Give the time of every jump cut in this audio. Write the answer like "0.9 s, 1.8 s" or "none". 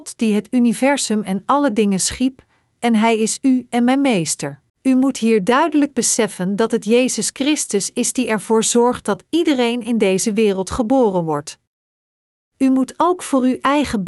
4.7 s